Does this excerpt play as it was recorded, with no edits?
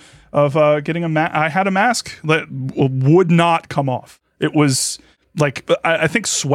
yes; 0 cuts

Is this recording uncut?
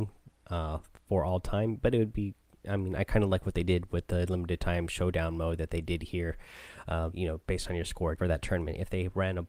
no; 2 cuts; at 7.1 s, 8.2 s

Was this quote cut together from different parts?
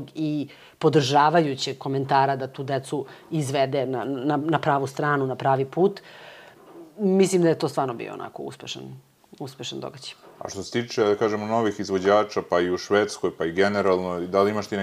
no; 0 cuts

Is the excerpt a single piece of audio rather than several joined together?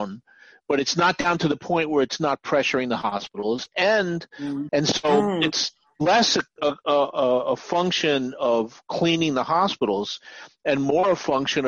no; 1 cut; at 4.7 s

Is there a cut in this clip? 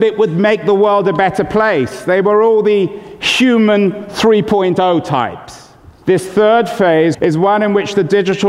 yes; 2 cuts; at 6.0 s, 7.1 s

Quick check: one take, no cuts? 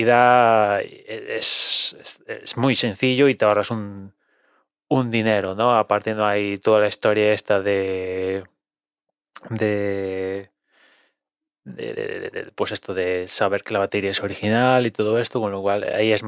yes; 0 cuts

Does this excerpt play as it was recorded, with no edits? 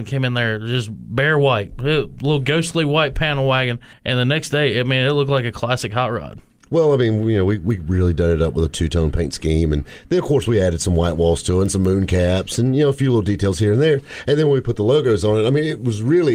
yes; 0 cuts

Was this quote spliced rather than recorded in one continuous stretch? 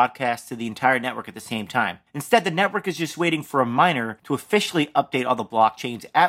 no; 0 cuts

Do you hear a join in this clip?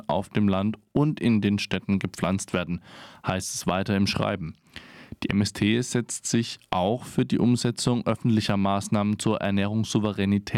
no; 0 cuts

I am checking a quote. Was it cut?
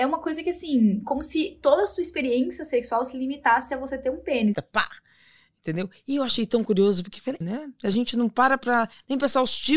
yes; 2 cuts; at 4.5 s, 7.4 s

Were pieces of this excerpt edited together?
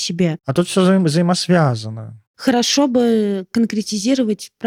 no; 0 cuts

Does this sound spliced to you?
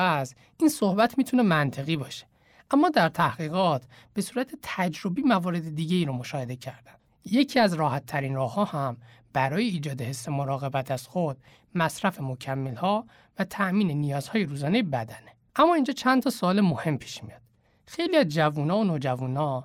yes; 1 cut; at 7.1 s

